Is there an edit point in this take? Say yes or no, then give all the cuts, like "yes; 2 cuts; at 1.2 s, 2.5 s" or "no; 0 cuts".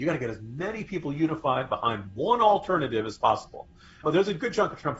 yes; 1 cut; at 4.0 s